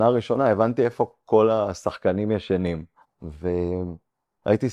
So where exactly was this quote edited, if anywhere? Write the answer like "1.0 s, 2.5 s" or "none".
3.1 s